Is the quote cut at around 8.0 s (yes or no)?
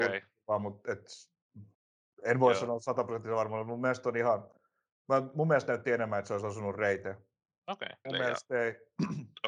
yes